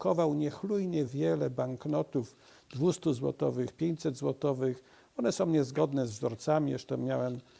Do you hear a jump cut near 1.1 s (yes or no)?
yes